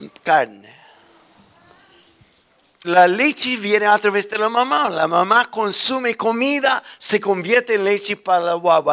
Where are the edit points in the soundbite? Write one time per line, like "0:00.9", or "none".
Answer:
0:02.8